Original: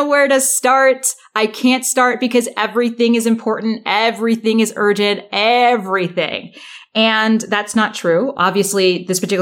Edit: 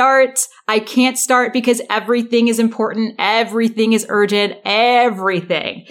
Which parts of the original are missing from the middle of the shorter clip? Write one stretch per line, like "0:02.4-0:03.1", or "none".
none